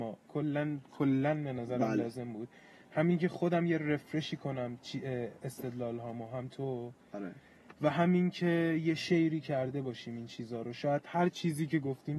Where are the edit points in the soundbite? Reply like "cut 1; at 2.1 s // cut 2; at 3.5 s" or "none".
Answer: none